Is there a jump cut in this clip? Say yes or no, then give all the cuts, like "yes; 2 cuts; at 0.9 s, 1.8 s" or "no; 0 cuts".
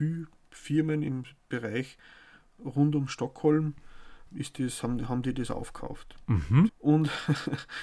yes; 2 cuts; at 4.3 s, 6.7 s